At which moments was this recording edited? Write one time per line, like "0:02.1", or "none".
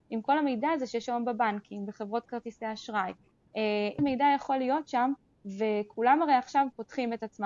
0:04.0